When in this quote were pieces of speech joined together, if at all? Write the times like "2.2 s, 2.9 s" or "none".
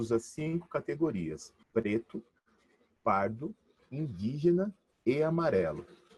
1.6 s, 3.8 s